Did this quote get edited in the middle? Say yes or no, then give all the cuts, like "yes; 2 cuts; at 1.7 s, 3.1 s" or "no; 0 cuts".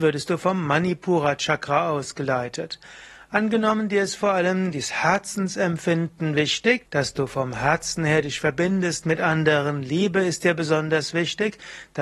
yes; 1 cut; at 6.9 s